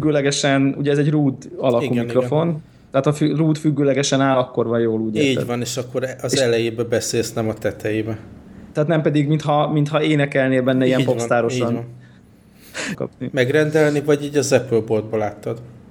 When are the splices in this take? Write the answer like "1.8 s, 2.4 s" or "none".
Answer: 12.9 s